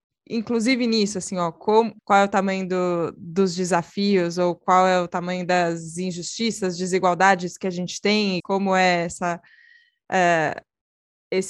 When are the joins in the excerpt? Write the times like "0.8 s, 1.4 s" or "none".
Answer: 2.0 s, 8.4 s